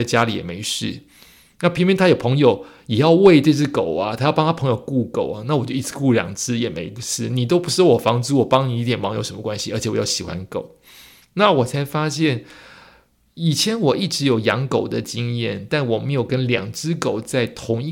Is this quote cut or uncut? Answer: uncut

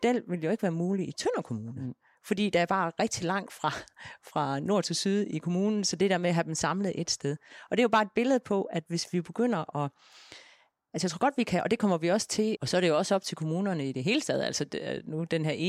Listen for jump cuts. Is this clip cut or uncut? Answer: cut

